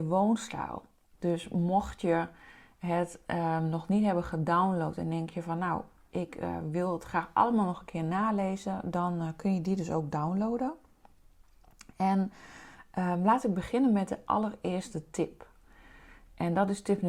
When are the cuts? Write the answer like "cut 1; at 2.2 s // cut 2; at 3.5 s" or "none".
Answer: cut 1; at 1.1 s